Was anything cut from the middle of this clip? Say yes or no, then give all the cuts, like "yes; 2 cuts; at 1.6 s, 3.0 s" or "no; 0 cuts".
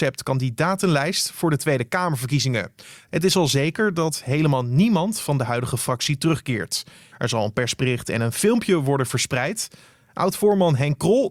yes; 1 cut; at 7.1 s